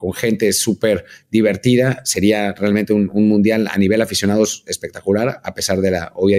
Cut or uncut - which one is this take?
uncut